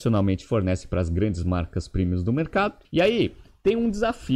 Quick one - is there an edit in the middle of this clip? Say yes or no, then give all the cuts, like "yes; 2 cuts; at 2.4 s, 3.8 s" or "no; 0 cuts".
yes; 1 cut; at 2.8 s